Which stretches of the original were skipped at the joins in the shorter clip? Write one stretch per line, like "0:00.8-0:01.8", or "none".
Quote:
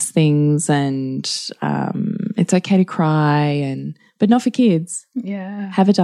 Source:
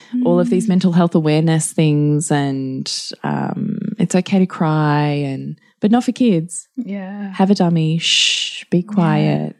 none